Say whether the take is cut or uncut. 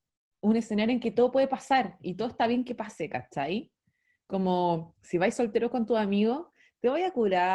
uncut